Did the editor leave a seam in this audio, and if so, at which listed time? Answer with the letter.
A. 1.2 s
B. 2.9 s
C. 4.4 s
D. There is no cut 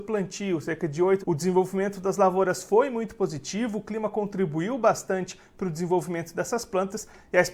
A